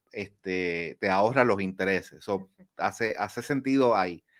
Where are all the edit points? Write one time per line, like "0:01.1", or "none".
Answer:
none